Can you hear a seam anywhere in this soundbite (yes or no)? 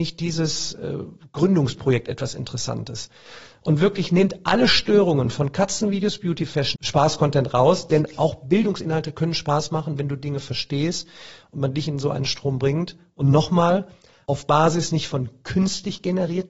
yes